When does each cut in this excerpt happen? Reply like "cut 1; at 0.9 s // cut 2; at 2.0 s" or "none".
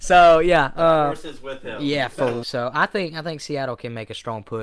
cut 1; at 2.4 s